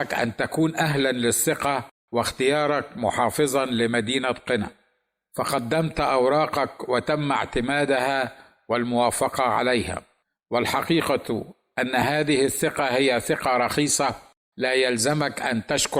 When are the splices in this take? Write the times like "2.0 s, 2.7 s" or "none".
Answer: none